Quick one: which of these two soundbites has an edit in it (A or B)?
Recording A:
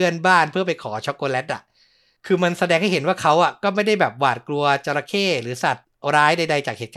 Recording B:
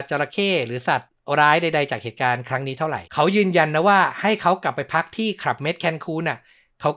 B